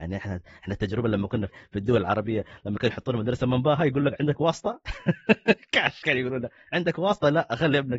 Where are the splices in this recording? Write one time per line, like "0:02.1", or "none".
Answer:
0:01.5